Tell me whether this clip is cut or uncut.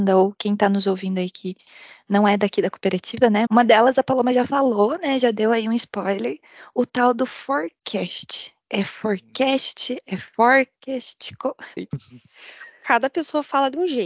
cut